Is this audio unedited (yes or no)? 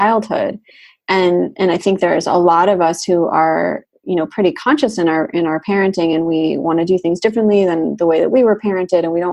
yes